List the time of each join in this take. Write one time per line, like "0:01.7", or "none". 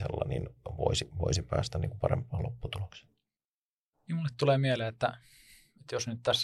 none